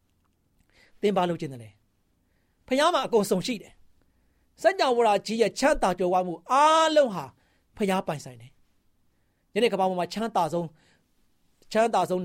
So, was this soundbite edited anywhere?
no; 0 cuts

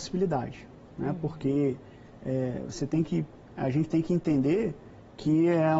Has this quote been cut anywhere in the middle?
no; 0 cuts

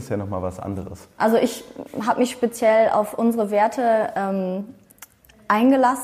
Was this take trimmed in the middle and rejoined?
yes; 1 cut; at 1.2 s

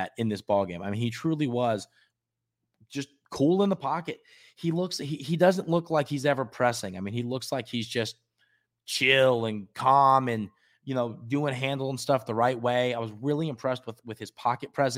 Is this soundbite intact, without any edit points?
yes; 0 cuts

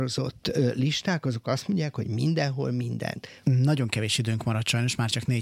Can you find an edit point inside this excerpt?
yes; 1 cut; at 3.4 s

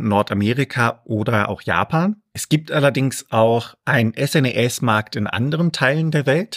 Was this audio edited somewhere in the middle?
no; 0 cuts

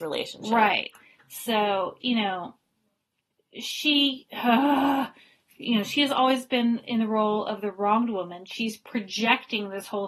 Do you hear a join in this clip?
yes; 1 cut; at 2.0 s

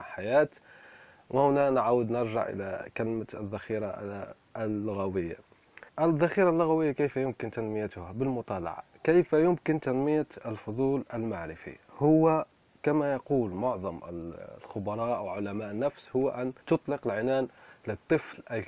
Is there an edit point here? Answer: yes; 2 cuts; at 5.9 s, 16.6 s

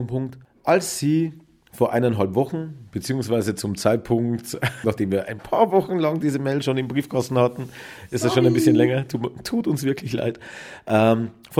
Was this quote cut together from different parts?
yes; 1 cut; at 4.8 s

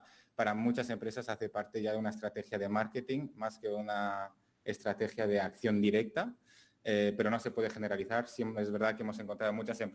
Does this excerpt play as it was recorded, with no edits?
yes; 0 cuts

